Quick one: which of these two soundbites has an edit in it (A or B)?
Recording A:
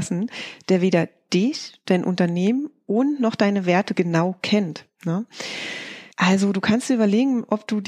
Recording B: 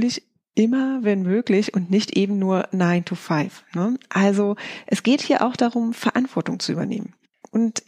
A